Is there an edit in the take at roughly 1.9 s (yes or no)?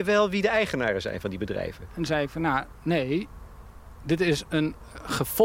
yes